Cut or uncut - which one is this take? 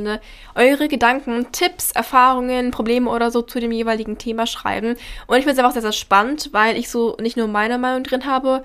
uncut